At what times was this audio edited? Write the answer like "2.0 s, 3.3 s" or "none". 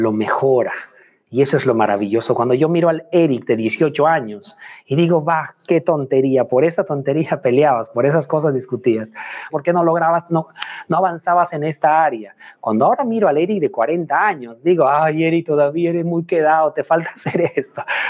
9.5 s